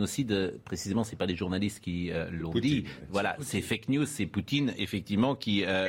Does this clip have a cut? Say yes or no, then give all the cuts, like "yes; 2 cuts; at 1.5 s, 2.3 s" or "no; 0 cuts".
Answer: no; 0 cuts